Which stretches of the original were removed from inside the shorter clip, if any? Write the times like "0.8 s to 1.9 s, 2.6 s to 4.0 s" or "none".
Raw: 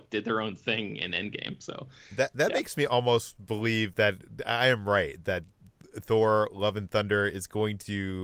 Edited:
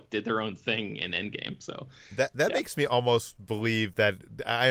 none